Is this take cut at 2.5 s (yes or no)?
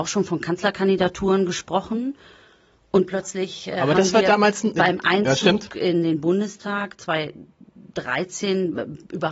no